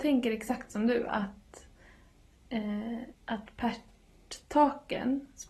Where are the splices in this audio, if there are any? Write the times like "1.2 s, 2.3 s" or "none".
3.1 s